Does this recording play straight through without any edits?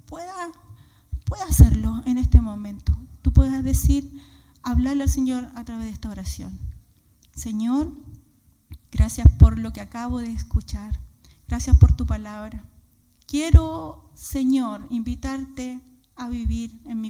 no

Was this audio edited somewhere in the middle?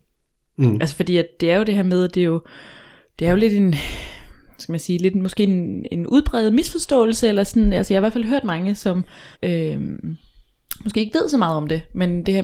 yes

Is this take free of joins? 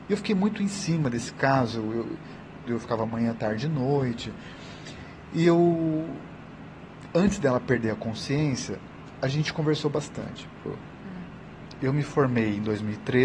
no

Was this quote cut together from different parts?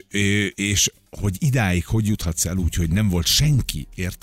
no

